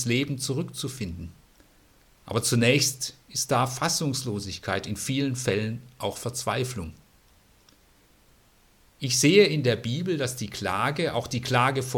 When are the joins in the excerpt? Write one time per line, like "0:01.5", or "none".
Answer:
none

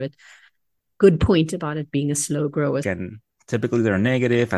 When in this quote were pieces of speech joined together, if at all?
0:02.8

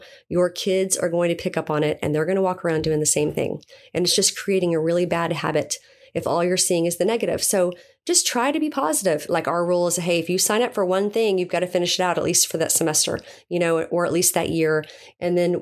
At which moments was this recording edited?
0:09.3

